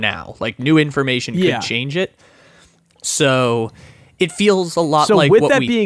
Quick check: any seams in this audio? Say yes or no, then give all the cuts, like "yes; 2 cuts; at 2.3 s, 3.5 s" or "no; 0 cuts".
no; 0 cuts